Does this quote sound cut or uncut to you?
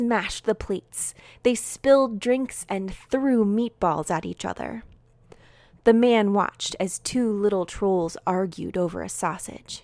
uncut